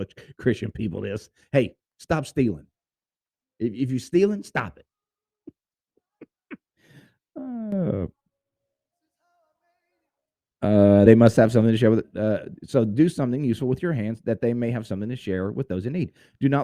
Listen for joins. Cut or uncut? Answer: uncut